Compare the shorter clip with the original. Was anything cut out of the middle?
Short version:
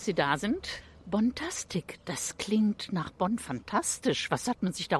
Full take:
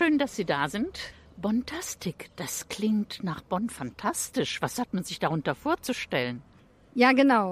no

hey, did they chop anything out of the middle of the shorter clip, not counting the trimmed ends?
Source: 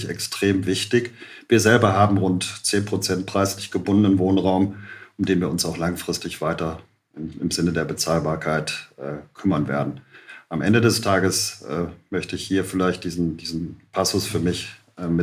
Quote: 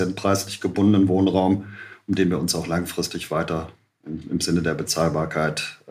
no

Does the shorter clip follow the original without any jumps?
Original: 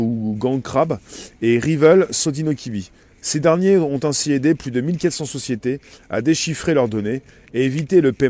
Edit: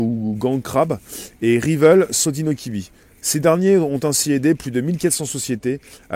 yes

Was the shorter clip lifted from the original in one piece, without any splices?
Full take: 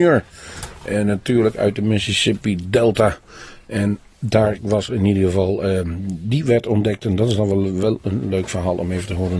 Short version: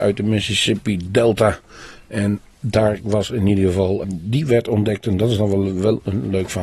no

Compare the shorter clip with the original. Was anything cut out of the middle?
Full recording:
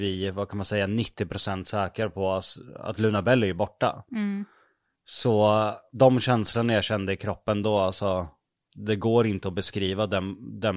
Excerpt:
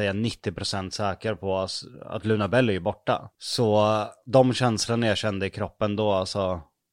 yes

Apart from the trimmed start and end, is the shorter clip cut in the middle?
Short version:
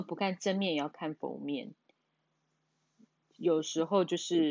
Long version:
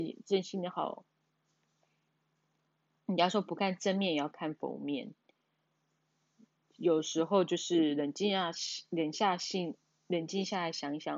no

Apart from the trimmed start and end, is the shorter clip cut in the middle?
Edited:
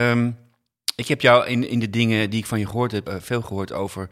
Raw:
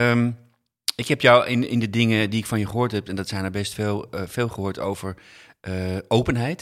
yes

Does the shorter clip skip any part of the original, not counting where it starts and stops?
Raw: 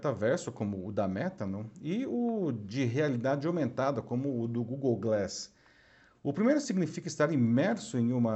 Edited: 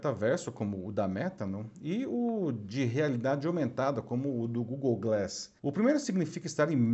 yes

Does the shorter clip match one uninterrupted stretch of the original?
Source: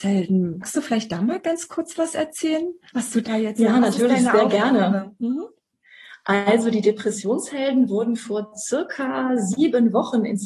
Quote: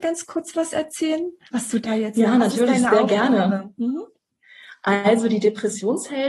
yes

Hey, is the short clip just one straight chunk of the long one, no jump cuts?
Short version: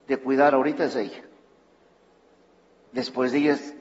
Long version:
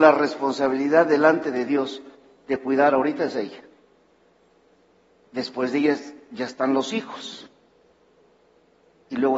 yes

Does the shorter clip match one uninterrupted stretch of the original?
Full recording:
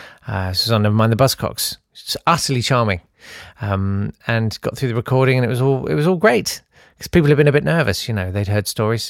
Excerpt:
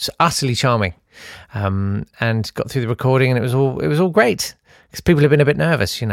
yes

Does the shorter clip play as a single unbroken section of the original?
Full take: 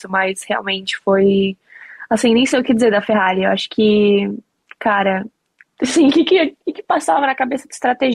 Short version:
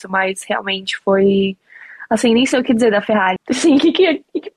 no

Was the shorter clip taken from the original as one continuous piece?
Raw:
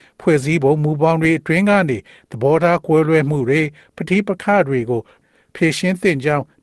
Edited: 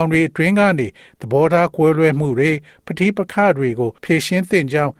no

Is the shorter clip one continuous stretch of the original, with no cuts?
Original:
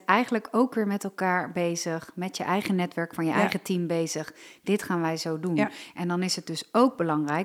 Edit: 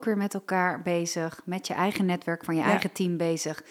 yes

